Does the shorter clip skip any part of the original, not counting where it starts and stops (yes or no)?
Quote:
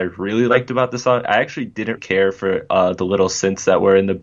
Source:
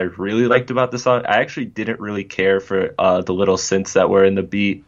yes